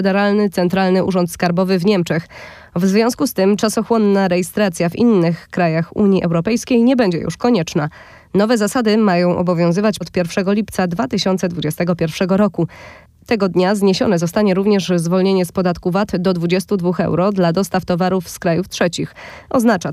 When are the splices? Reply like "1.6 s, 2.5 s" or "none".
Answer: 10.0 s